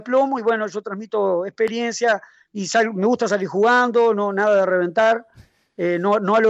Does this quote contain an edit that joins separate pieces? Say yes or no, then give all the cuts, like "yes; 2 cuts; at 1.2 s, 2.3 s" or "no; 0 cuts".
no; 0 cuts